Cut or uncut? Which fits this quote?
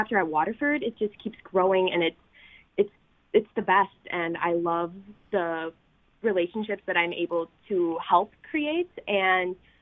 uncut